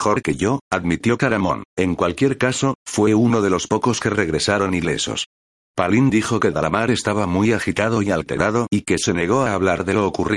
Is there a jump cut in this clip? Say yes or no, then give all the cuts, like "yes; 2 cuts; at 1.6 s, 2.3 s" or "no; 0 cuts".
yes; 2 cuts; at 1.7 s, 2.8 s